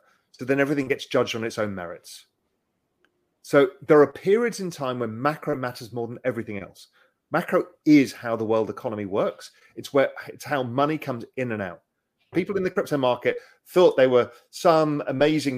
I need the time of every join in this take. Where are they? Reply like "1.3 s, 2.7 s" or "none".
12.3 s